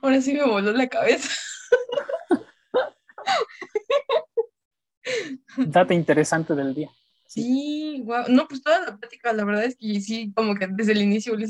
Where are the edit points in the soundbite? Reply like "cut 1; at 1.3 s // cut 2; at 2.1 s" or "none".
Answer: none